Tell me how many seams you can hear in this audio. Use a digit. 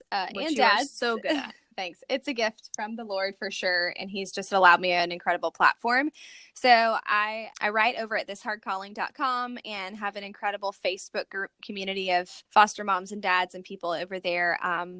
2